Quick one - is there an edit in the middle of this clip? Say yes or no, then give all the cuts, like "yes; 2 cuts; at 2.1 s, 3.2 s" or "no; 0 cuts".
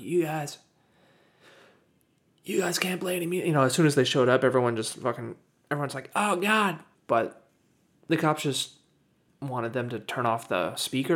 yes; 2 cuts; at 7.0 s, 9.3 s